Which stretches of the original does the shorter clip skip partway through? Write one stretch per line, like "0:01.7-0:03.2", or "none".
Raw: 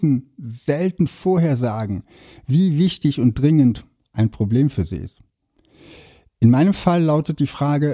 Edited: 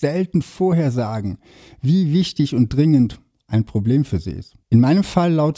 0:05.3-0:06.3